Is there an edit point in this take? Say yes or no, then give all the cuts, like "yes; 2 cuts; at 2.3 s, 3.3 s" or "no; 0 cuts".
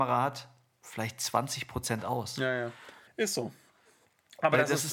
yes; 1 cut; at 3.1 s